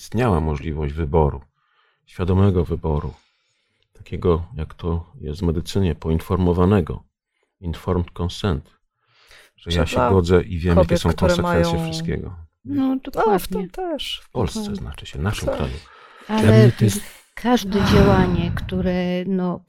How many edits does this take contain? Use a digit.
1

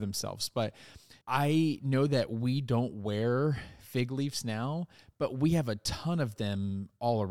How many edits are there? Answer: 1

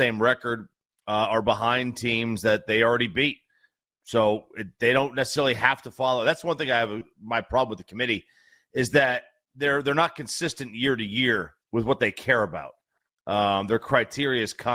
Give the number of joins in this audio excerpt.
1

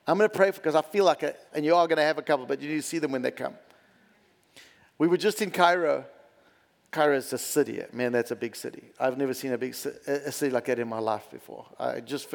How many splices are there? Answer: 1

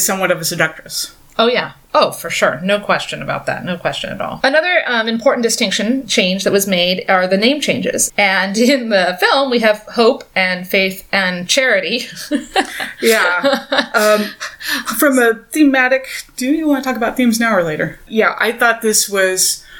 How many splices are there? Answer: 2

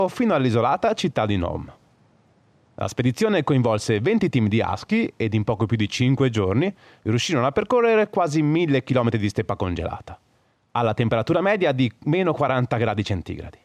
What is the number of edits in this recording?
0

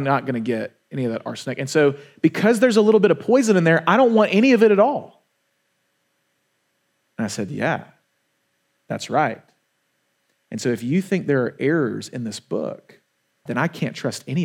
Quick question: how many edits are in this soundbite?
1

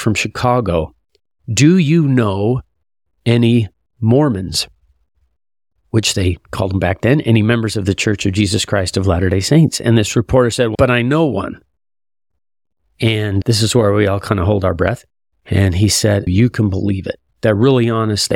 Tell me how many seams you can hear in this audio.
2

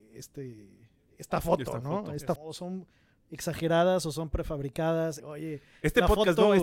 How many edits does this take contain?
2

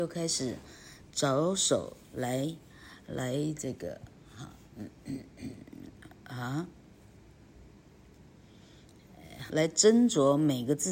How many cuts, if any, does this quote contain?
1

